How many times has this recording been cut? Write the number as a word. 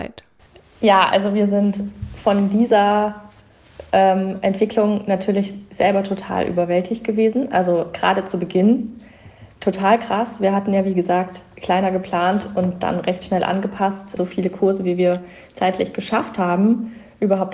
one